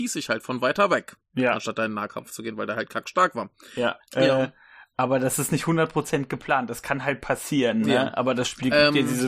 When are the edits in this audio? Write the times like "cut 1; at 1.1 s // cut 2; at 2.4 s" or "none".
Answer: cut 1; at 4.0 s